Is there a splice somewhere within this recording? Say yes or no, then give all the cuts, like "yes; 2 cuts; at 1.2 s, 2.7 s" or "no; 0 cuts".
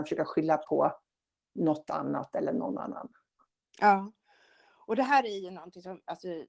no; 0 cuts